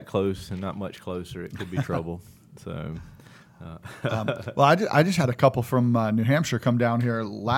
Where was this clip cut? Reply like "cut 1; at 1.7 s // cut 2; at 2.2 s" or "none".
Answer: none